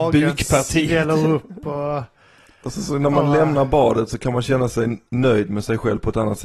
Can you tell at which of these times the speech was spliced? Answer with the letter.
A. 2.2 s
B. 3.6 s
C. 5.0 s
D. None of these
D